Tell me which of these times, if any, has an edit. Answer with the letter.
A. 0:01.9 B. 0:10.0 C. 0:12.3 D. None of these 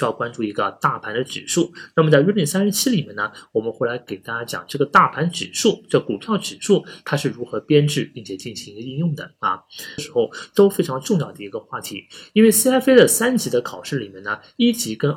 B